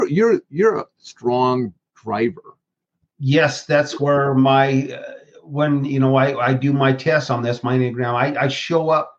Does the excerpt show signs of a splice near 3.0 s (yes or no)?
no